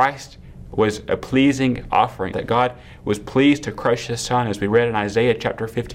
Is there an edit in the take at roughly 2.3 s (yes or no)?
yes